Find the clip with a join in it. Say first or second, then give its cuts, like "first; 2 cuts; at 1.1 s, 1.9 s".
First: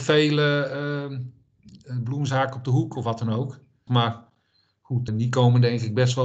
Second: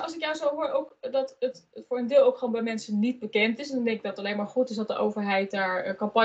first; 2 cuts; at 3.9 s, 5.1 s